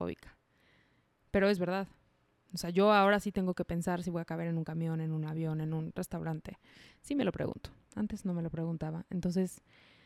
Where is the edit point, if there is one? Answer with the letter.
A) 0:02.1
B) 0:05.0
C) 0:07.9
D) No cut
D